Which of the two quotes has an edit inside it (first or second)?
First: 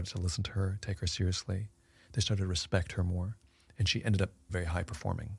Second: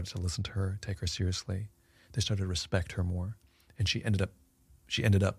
first